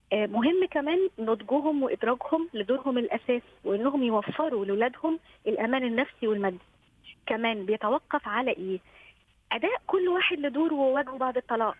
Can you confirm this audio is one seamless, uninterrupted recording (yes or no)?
yes